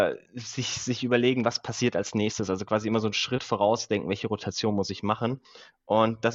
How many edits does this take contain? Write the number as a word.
zero